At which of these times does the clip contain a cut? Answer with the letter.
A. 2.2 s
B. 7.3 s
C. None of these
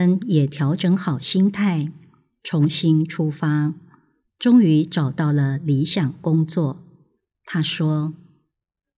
C